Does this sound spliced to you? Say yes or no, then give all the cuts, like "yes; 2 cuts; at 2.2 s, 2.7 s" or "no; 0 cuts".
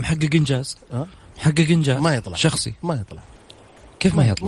no; 0 cuts